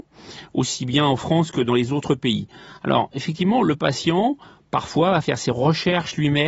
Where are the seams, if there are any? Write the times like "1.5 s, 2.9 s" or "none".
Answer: none